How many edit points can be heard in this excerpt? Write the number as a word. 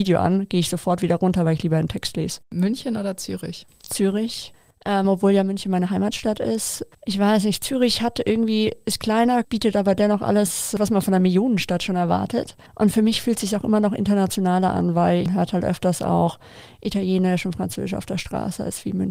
two